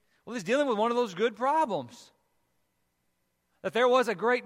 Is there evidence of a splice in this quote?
no; 0 cuts

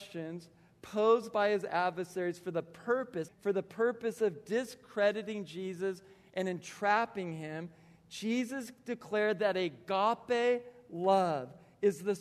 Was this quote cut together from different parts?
yes; 1 cut; at 3.3 s

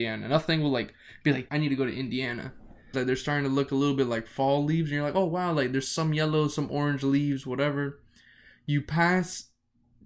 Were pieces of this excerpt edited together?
yes; 2 cuts; at 1.5 s, 2.9 s

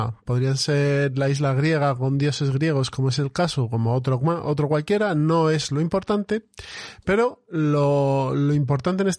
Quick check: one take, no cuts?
yes; 0 cuts

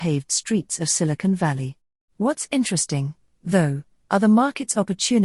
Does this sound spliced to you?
yes; 1 cut; at 2.0 s

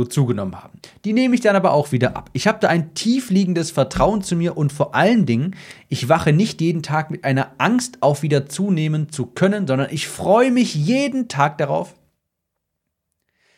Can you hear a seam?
no; 0 cuts

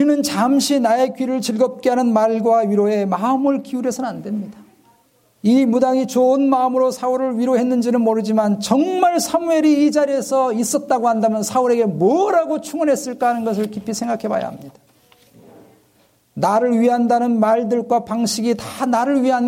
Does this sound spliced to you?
no; 0 cuts

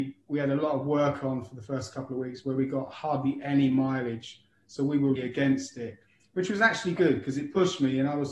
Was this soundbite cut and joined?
yes; 2 cuts; at 5.2 s, 7.0 s

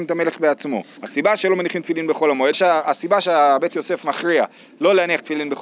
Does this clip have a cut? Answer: yes; 2 cuts; at 1.0 s, 2.5 s

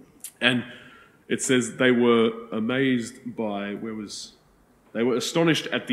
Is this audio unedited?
yes; 0 cuts

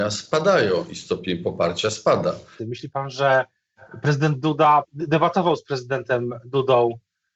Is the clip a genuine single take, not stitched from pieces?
no; 2 cuts; at 2.6 s, 4.8 s

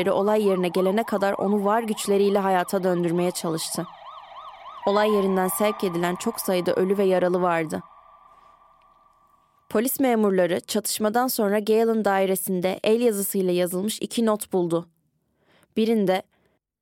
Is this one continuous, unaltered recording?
no; 1 cut; at 4.8 s

